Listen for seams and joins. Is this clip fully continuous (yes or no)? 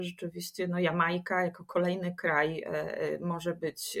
yes